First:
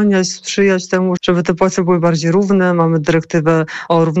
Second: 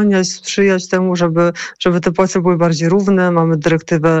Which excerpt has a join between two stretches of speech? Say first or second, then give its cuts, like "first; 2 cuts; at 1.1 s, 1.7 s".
first; 1 cut; at 1.2 s